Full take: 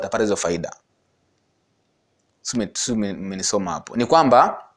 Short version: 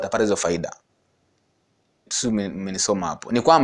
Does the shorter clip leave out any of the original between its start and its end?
yes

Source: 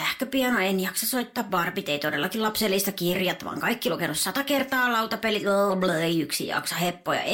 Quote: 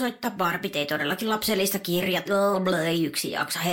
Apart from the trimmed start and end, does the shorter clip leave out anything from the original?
yes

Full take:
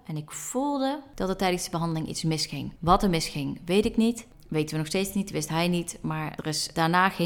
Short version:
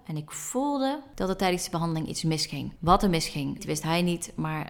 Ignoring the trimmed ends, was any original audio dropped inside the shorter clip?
yes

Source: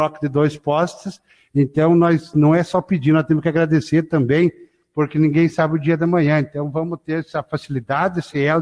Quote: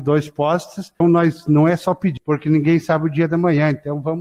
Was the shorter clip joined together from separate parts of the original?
yes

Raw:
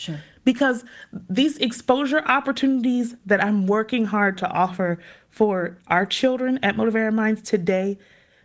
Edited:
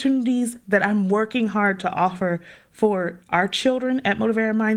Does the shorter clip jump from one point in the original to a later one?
no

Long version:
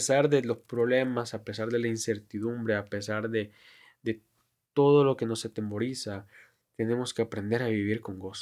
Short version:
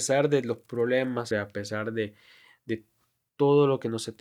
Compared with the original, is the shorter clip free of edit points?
no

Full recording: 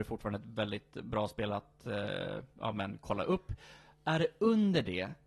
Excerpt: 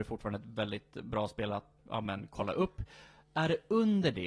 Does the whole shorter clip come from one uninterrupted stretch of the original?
no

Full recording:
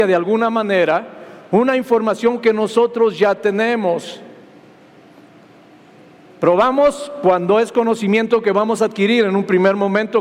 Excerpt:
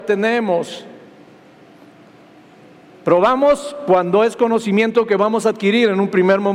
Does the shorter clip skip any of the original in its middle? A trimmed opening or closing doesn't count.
no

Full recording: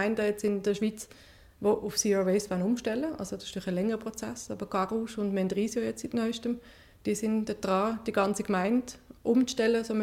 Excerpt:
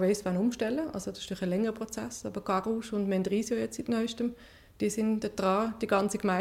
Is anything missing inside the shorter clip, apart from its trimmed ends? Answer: no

